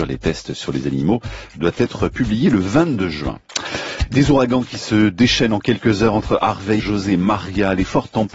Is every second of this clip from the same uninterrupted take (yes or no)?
no